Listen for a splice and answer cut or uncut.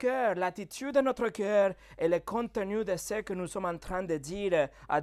uncut